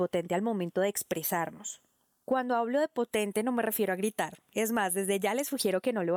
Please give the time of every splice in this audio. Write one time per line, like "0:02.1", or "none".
none